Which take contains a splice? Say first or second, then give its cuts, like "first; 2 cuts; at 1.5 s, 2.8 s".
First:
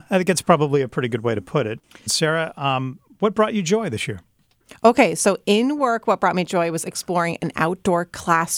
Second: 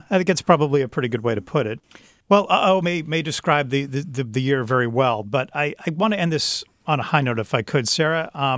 first; 1 cut; at 2.1 s